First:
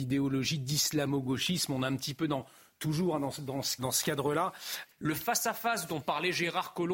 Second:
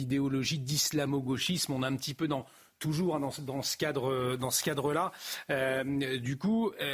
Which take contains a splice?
first; 2 cuts; at 3.8 s, 4.9 s

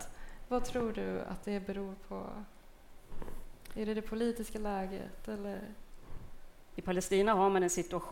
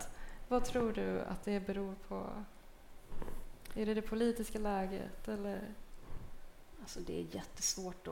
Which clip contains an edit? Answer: first; 1 cut; at 6.7 s

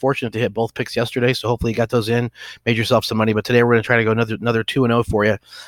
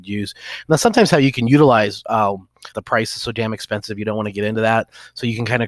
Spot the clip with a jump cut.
second; 1 cut; at 2.7 s

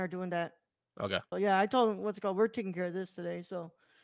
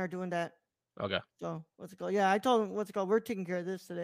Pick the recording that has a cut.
first; 1 cut; at 1.3 s

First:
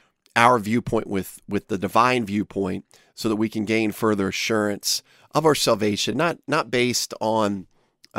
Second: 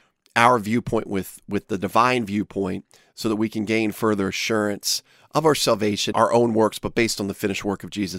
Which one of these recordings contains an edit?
second; 1 cut; at 6.1 s

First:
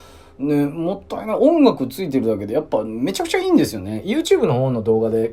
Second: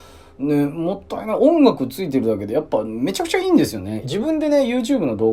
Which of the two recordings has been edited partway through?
second; 1 cut; at 4.0 s

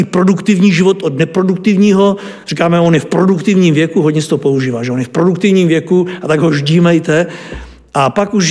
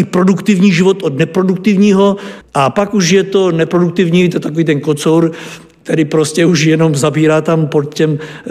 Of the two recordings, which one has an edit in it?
second; 1 cut; at 2.4 s

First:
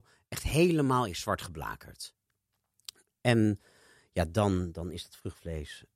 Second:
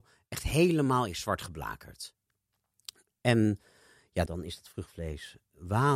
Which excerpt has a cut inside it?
second; 1 cut; at 4.3 s

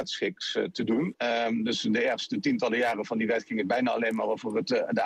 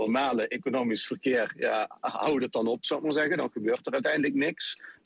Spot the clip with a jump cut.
first; 1 cut; at 1.1 s

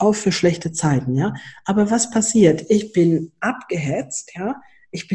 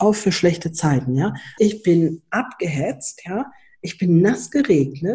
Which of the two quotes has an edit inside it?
second; 1 cut; at 1.6 s

